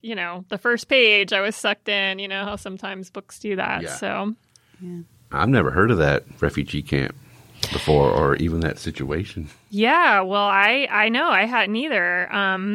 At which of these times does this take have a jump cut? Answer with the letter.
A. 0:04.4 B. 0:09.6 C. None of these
C